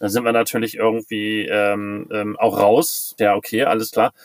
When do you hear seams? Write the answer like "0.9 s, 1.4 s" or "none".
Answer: 3.2 s